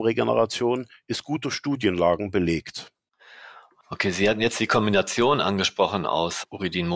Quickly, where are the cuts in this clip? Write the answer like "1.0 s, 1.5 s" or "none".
none